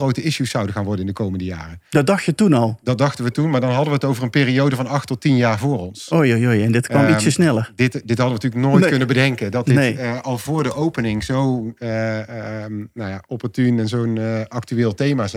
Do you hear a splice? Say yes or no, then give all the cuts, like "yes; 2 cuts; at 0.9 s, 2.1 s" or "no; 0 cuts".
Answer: no; 0 cuts